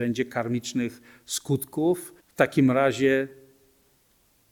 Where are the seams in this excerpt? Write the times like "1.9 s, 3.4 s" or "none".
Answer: 2.2 s

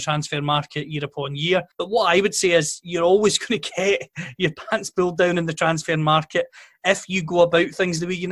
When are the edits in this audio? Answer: 1.7 s

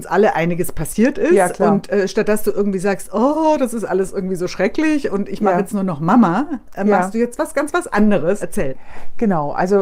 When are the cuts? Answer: 8.4 s

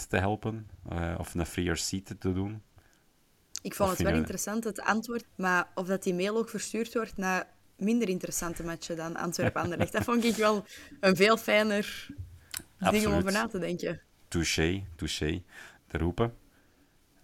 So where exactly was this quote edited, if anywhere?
5.2 s, 15.8 s

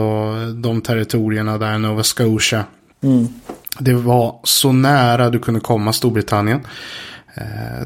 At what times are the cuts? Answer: none

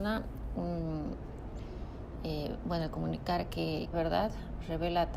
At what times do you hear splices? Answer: 3.9 s

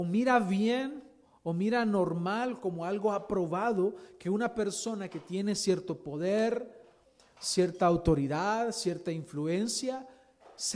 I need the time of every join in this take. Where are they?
none

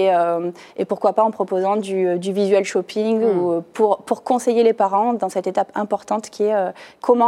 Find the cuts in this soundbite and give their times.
none

